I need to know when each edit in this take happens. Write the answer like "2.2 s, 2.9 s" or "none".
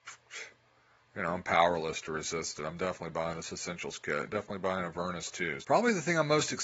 5.6 s